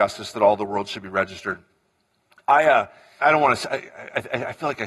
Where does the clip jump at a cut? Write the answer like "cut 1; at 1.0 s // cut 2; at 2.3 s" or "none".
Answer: cut 1; at 3.2 s